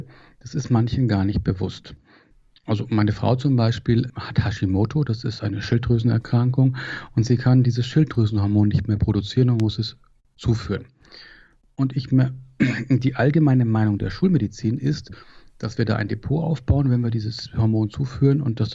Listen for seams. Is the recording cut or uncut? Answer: cut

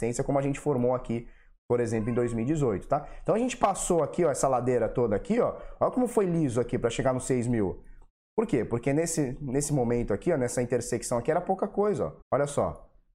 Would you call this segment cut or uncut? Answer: cut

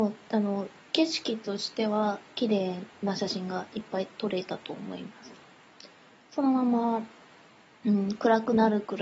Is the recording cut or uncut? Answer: uncut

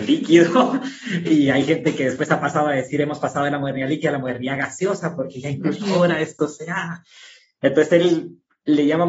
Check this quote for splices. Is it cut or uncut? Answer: uncut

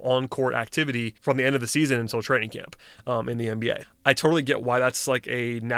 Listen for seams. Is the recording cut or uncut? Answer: cut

